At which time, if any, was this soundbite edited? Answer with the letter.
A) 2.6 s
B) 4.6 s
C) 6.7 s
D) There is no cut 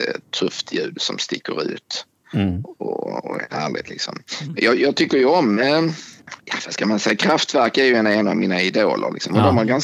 D